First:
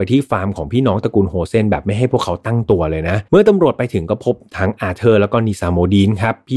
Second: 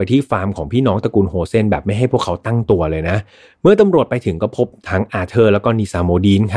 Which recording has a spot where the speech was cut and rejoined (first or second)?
first